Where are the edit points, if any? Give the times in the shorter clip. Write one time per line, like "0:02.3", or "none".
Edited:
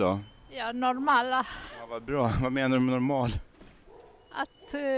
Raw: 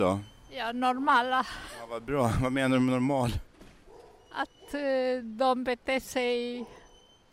none